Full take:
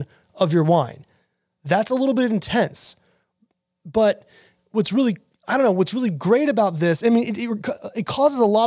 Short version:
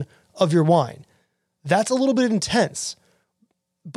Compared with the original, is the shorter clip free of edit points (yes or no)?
yes